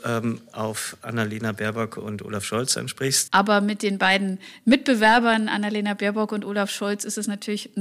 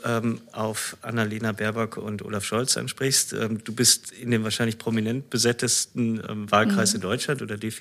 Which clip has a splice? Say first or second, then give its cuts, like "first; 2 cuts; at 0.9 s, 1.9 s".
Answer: first; 1 cut; at 3.3 s